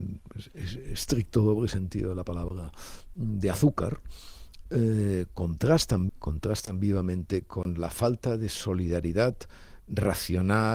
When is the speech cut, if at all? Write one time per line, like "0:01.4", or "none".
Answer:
0:06.1